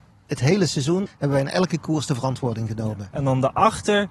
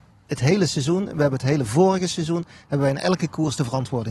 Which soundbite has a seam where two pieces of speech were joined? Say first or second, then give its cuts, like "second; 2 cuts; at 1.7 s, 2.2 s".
first; 2 cuts; at 1.1 s, 3.1 s